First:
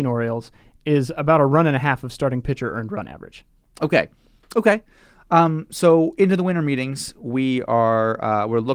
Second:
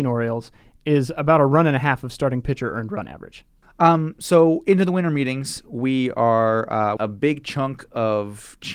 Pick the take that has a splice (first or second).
second